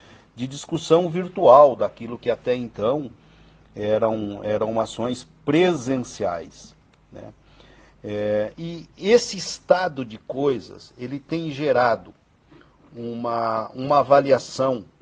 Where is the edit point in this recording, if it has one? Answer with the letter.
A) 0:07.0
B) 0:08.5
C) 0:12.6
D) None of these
B